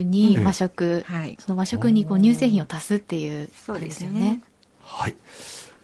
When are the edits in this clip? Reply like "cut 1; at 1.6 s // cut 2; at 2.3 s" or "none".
none